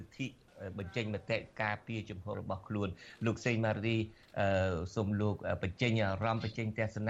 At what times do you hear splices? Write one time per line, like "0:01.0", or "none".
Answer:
0:02.3